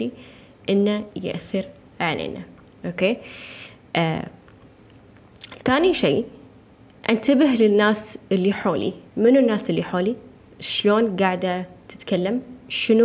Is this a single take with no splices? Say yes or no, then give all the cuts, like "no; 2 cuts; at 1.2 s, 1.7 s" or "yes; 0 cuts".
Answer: no; 2 cuts; at 5.6 s, 9.1 s